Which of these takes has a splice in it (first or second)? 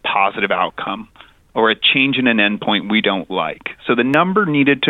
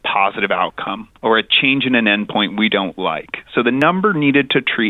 second